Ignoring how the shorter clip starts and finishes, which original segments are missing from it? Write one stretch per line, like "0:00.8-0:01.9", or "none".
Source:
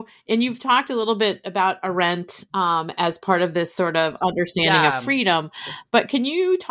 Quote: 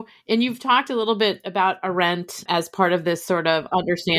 0:02.5-0:02.9